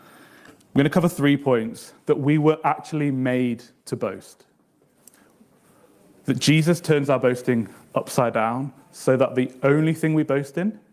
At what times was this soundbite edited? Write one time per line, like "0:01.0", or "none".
none